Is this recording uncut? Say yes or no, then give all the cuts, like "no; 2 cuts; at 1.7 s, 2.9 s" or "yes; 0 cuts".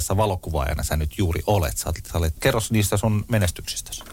no; 1 cut; at 2.4 s